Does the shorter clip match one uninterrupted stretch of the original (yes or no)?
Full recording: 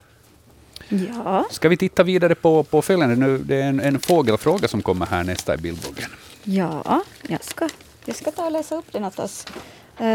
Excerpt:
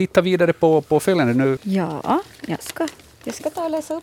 no